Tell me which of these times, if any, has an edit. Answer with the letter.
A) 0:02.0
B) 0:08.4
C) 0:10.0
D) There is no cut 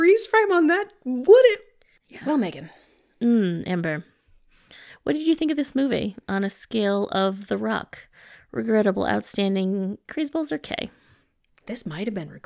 A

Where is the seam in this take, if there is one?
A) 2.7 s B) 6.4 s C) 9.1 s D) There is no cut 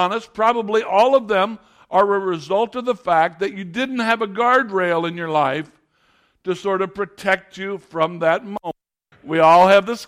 C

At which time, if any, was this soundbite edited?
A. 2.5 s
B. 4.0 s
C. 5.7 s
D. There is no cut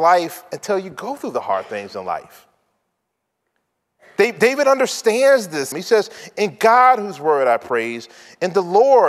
C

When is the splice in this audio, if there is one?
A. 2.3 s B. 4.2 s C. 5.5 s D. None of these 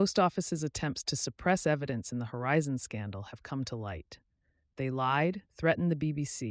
C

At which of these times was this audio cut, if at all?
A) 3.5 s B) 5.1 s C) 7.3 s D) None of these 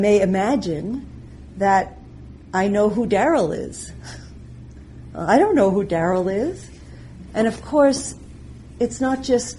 C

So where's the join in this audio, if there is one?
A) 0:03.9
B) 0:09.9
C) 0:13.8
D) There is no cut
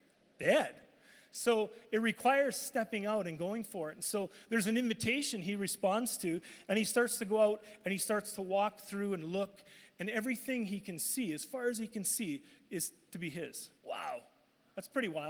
C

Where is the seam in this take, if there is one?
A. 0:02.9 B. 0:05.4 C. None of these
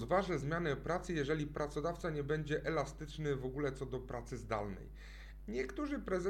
B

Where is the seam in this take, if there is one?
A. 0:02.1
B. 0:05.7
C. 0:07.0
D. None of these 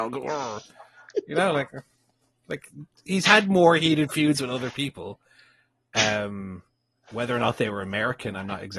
D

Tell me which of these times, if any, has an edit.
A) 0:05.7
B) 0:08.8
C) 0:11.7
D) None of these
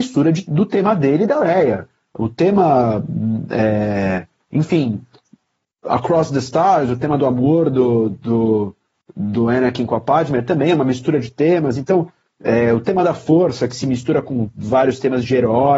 D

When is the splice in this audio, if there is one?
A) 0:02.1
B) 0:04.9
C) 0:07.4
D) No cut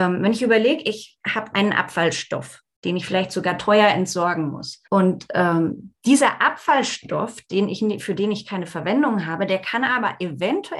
B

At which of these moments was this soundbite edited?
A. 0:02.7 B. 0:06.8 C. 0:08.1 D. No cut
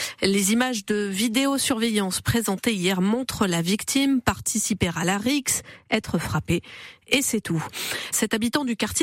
C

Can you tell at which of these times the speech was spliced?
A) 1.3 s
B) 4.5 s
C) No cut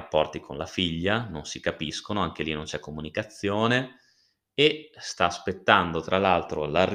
C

